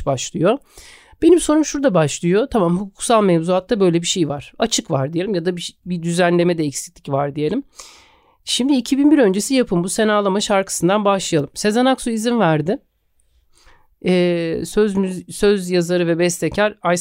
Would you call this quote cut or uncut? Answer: uncut